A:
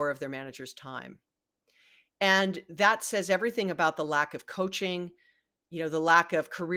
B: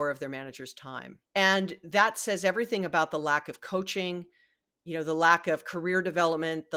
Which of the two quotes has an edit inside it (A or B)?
B